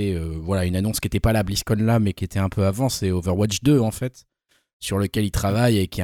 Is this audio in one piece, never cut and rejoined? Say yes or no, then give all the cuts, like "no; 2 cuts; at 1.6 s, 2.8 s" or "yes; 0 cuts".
yes; 0 cuts